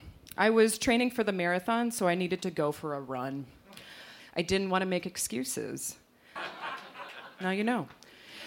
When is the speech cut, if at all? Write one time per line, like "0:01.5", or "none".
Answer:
0:04.2
0:06.4